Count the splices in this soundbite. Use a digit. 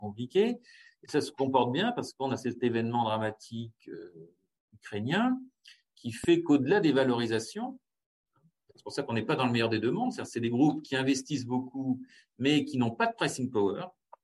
0